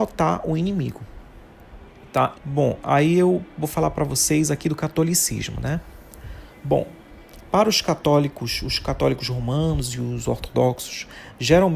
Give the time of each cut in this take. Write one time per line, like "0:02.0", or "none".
0:02.3